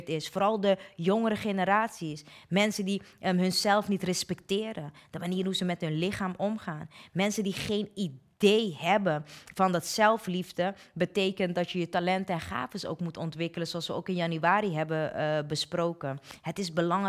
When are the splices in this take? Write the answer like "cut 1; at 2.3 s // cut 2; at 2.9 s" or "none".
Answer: none